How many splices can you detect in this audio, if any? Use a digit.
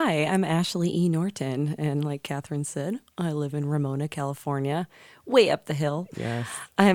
0